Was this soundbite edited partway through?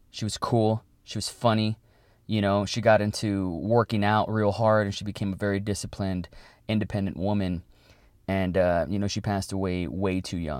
no; 0 cuts

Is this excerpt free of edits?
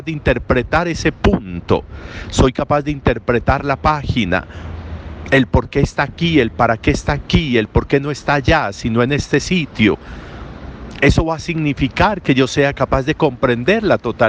yes; 0 cuts

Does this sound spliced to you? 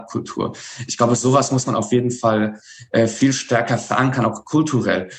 no; 0 cuts

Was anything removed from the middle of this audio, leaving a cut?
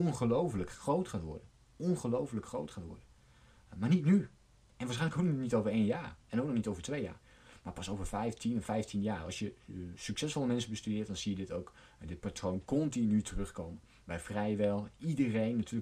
no; 0 cuts

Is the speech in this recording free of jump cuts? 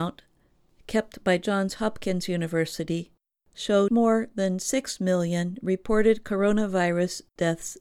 no; 1 cut; at 3.9 s

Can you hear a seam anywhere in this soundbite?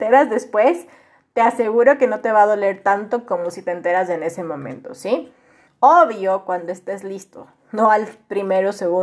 yes; 1 cut; at 5.7 s

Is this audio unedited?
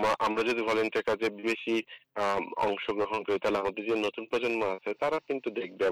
no; 1 cut; at 1.4 s

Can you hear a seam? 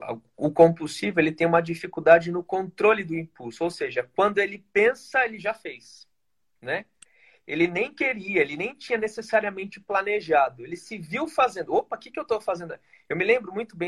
no; 0 cuts

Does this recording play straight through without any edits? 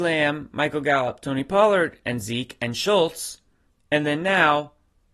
yes; 0 cuts

